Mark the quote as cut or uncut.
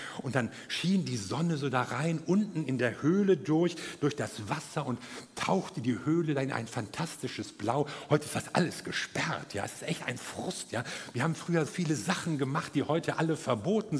cut